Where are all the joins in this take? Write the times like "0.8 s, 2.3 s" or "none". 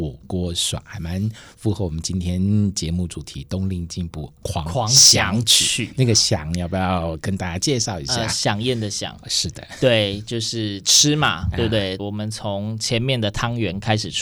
12.0 s